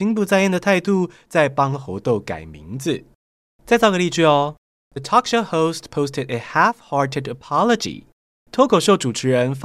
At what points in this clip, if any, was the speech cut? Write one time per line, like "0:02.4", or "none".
none